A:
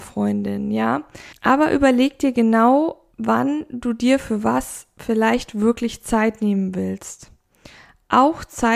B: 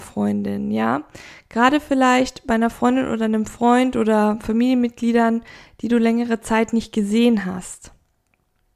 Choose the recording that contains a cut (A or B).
A